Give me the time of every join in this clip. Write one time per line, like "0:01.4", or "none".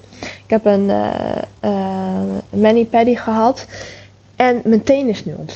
none